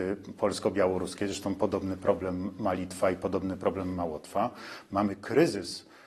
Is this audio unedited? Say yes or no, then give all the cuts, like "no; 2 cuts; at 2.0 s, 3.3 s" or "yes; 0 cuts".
yes; 0 cuts